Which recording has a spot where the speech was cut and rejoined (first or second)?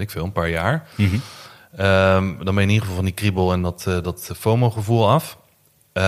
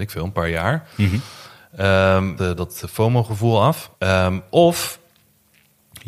second